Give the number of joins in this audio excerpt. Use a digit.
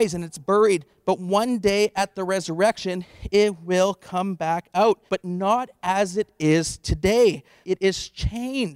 2